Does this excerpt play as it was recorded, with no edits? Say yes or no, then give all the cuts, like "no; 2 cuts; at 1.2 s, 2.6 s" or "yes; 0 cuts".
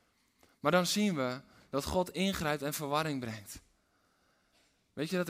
yes; 0 cuts